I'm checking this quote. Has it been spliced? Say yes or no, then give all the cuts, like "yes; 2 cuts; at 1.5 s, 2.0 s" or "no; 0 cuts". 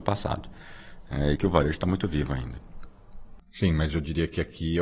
yes; 1 cut; at 1.4 s